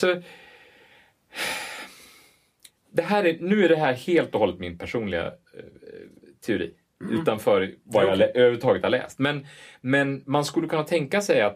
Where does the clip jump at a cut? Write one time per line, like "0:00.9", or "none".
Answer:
none

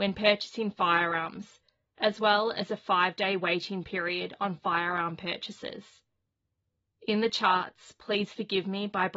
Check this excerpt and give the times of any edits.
none

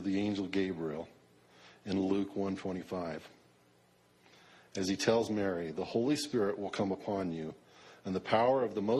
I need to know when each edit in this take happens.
none

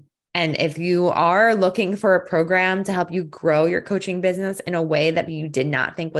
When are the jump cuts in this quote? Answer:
0:05.3

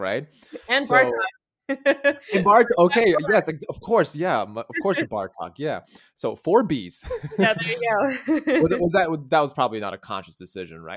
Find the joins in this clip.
none

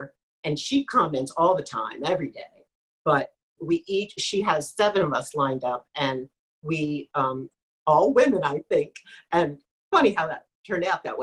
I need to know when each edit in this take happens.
0:03.6

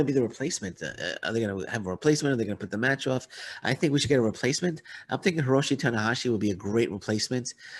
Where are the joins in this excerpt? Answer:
none

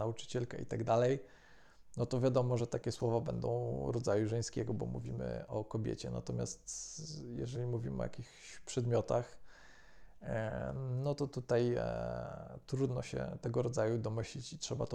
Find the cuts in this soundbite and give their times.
none

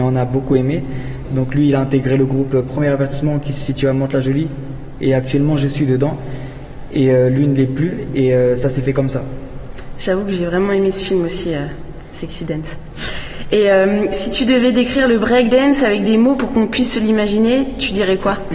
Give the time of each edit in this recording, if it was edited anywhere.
0:01.2

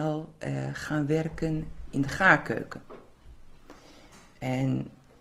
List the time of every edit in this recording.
none

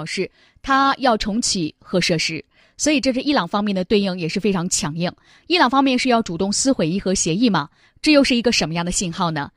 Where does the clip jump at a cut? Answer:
none

